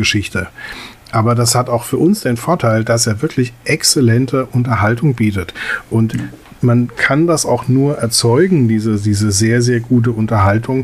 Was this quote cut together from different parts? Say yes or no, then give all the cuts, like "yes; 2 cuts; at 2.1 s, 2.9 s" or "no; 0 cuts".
no; 0 cuts